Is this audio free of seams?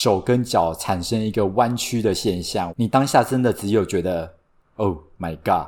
no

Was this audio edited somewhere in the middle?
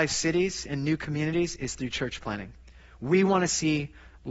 no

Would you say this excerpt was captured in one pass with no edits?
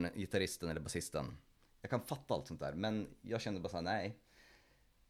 yes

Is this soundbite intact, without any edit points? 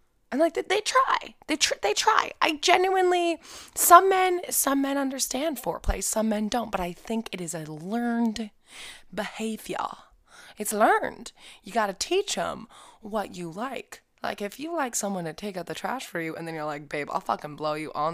yes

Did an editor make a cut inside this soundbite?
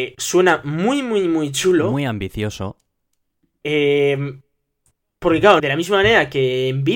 yes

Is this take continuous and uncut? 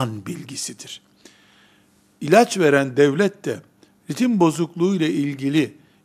yes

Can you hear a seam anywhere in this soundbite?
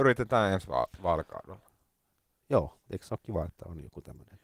no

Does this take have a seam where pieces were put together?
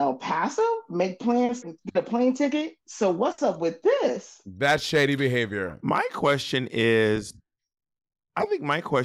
yes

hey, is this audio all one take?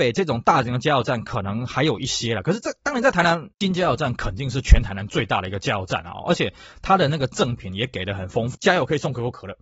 no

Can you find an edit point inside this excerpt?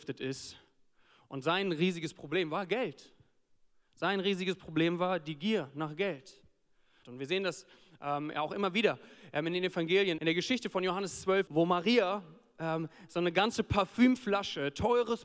yes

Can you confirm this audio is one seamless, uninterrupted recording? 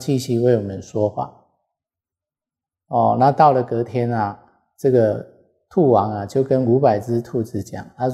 yes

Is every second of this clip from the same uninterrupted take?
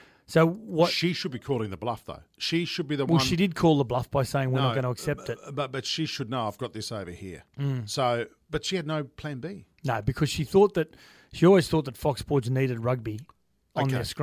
yes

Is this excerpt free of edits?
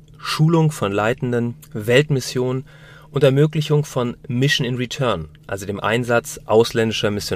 no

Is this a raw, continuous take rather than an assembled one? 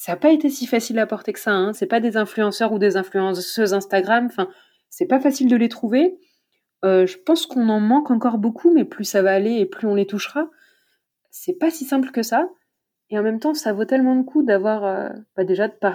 no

